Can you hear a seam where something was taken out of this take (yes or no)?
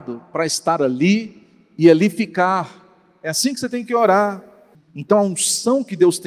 yes